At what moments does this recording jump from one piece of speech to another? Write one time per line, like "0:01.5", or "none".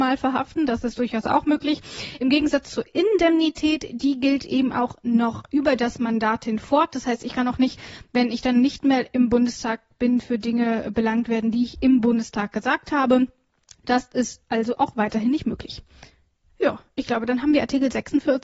none